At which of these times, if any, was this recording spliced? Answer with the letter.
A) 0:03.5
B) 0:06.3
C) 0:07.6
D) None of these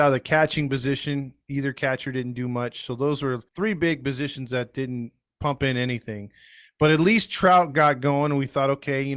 A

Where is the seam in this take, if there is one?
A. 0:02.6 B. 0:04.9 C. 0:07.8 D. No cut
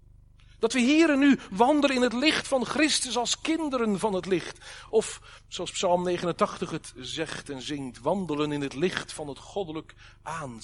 D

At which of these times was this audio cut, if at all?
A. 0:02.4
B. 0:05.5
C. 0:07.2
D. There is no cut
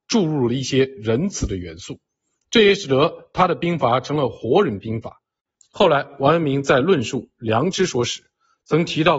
B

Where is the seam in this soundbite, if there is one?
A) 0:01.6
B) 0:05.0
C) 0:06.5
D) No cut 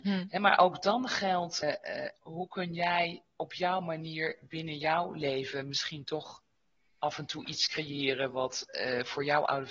A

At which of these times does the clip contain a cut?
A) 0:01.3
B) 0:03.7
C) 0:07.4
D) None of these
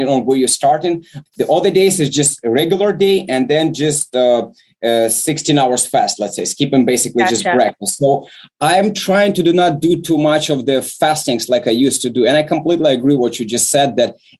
A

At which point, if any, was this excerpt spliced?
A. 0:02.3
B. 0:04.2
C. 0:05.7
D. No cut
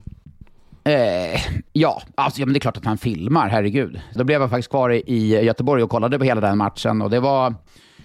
B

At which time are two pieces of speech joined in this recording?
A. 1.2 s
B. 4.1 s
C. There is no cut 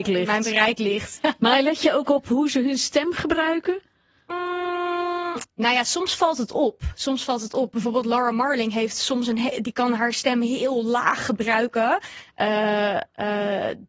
A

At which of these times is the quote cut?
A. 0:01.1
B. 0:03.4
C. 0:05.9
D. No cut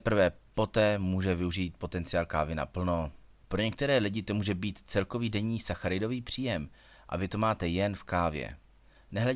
B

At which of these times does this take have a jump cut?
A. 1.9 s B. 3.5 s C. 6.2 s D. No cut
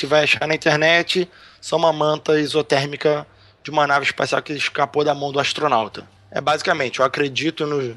C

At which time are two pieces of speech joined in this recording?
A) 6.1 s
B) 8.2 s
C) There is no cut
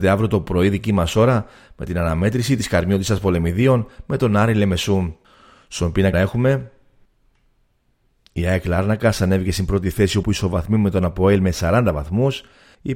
A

